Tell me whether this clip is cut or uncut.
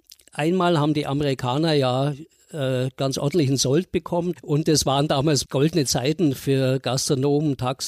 cut